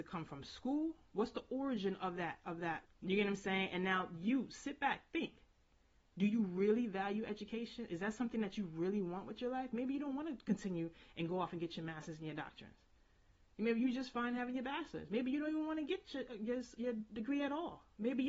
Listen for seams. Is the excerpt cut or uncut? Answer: cut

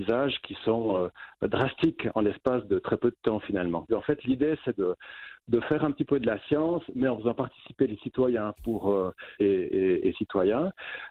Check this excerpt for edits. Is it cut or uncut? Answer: cut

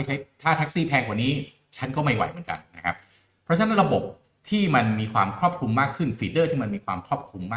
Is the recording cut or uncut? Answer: uncut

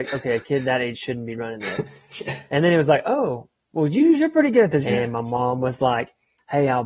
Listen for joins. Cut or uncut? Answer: cut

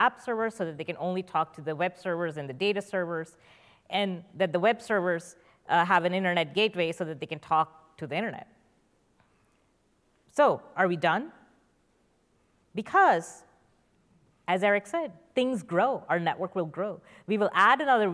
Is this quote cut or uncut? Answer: cut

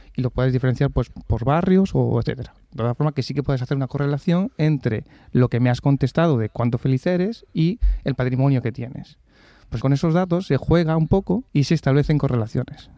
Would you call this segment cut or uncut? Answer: cut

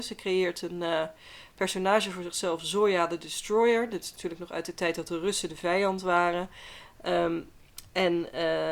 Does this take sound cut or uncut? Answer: uncut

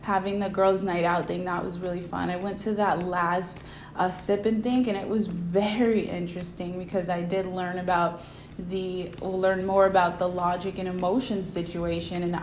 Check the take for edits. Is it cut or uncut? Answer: uncut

